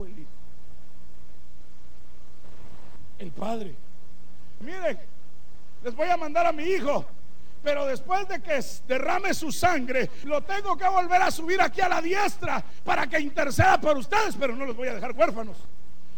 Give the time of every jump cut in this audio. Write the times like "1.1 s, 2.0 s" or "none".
4.6 s, 10.2 s